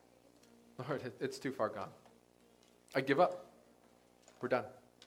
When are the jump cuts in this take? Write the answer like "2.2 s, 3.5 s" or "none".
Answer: 1.2 s

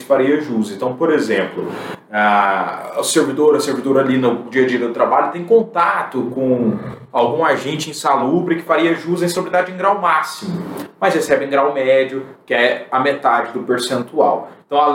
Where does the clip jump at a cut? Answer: none

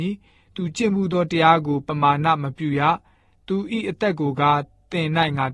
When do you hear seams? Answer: none

